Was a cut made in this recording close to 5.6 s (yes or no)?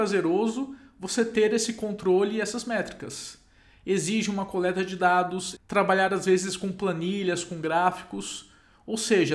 yes